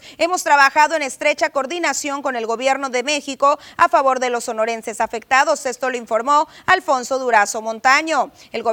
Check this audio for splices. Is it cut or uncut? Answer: uncut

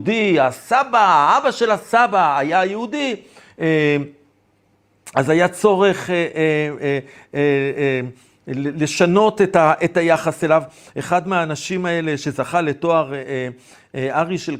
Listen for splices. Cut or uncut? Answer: uncut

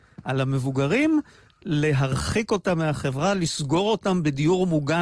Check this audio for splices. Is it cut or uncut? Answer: uncut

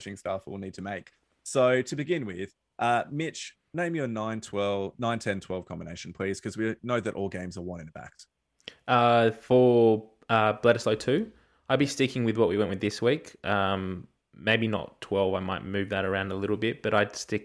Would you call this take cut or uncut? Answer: uncut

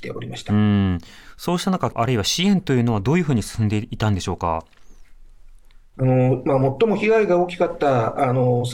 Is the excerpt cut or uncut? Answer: cut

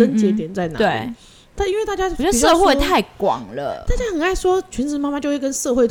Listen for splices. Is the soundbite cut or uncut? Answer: cut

